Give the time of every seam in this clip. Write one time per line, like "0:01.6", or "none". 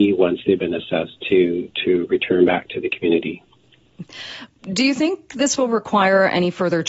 none